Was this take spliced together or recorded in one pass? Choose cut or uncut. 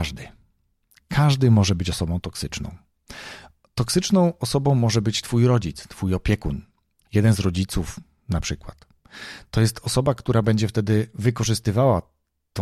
uncut